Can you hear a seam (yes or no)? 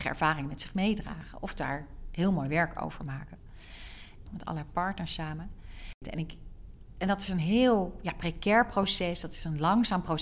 yes